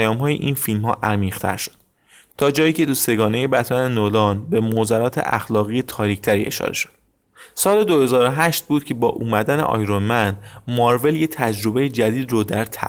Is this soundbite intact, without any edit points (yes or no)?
yes